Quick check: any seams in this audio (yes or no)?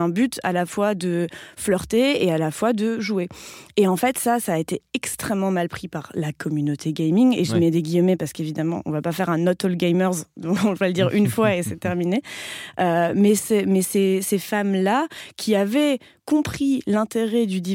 no